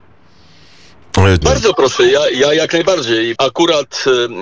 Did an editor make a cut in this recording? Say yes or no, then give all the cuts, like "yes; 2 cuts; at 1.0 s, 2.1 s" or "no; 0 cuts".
yes; 2 cuts; at 1.4 s, 3.4 s